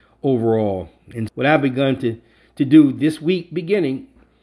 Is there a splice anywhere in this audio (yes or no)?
yes